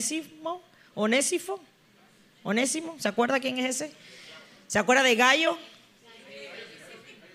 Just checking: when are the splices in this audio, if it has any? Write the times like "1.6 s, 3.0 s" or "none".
none